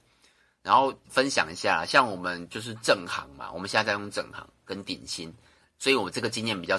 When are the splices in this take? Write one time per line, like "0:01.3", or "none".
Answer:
0:01.0